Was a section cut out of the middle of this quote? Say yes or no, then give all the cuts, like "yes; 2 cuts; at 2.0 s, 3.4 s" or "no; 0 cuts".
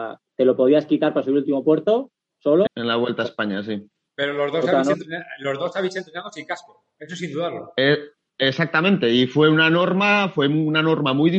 yes; 1 cut; at 2.7 s